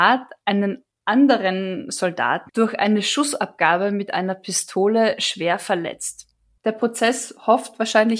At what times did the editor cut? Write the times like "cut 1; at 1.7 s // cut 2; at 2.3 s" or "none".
cut 1; at 2.5 s // cut 2; at 6.6 s